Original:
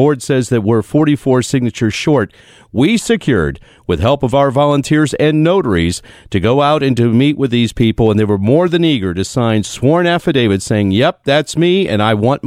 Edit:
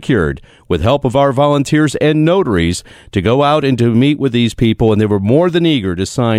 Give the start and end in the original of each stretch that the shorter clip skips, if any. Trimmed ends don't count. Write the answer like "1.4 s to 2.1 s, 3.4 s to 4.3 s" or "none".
none